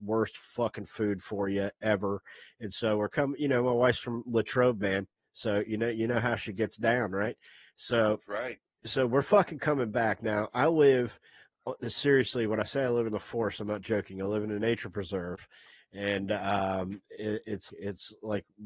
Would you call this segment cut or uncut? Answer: cut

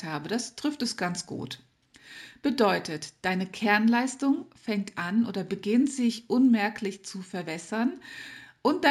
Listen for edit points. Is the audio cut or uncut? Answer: uncut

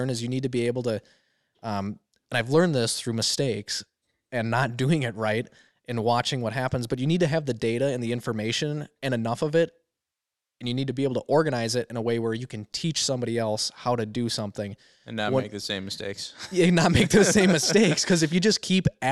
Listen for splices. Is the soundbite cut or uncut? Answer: uncut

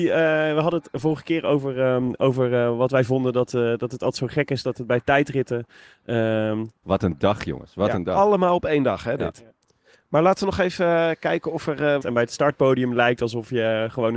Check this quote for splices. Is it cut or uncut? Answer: cut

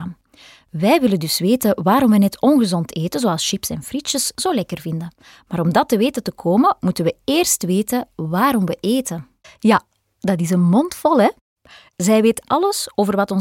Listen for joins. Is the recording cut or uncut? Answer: cut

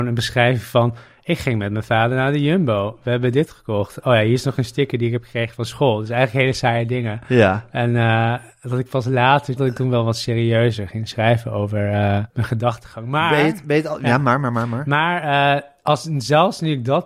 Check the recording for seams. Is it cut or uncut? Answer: cut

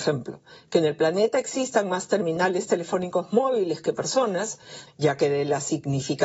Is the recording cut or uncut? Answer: cut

